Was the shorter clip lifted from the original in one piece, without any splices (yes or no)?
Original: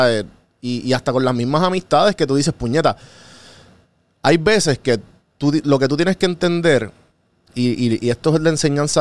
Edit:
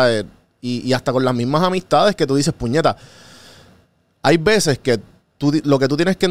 yes